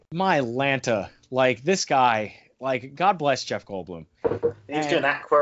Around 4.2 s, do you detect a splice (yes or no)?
yes